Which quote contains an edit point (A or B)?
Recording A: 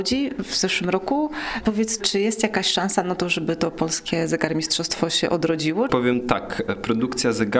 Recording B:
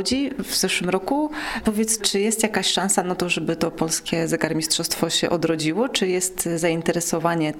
A